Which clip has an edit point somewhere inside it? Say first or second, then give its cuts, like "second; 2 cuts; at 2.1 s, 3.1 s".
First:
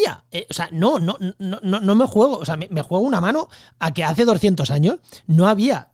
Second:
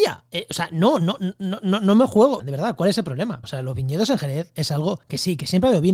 second; 2 cuts; at 2.4 s, 3.4 s